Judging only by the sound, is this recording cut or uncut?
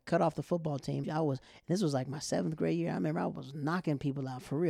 cut